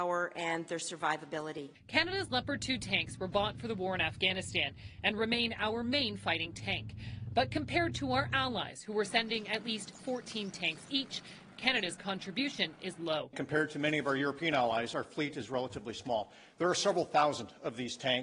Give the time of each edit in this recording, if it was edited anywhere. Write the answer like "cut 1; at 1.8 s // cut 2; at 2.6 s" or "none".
none